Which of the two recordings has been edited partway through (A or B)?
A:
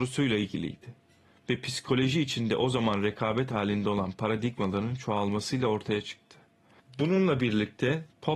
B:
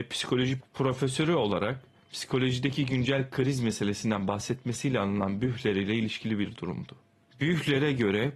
A